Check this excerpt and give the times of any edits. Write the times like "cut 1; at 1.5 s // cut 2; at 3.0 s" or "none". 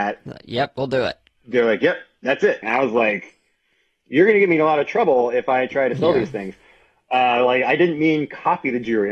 cut 1; at 2.6 s